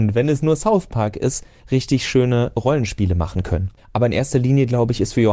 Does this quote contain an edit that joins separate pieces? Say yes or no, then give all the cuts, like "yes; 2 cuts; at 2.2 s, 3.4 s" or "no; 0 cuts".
yes; 1 cut; at 3.8 s